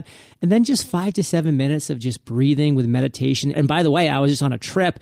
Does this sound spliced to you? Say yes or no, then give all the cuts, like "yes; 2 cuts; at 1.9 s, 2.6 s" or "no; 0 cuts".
yes; 1 cut; at 3.5 s